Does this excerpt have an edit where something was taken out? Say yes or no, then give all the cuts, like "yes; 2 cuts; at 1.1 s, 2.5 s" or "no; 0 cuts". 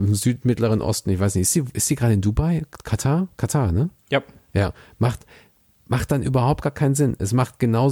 no; 0 cuts